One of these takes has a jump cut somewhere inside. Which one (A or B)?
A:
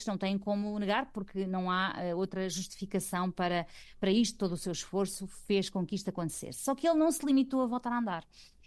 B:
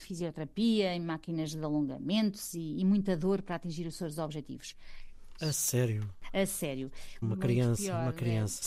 B